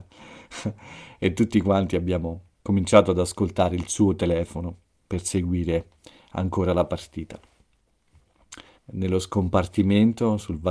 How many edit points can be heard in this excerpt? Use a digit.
2